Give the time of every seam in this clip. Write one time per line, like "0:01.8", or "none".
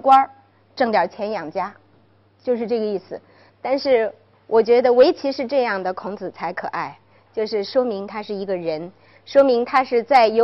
0:03.5